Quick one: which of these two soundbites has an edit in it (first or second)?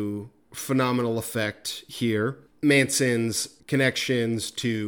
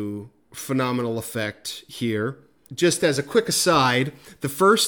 first